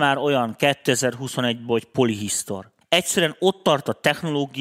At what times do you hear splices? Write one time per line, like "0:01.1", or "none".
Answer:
0:02.8